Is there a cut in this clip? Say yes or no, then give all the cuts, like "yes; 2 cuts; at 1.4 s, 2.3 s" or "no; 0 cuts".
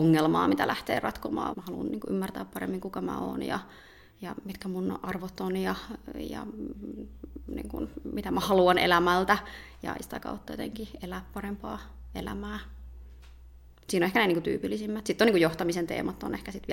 yes; 1 cut; at 1.5 s